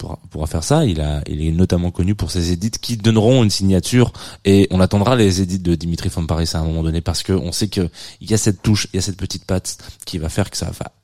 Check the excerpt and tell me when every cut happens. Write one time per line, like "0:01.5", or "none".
0:04.7